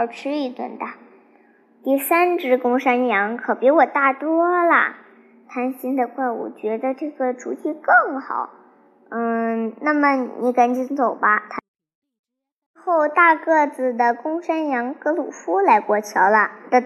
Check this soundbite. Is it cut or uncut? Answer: uncut